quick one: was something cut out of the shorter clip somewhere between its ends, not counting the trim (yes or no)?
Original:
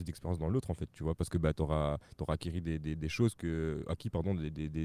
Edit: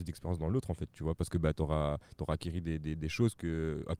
no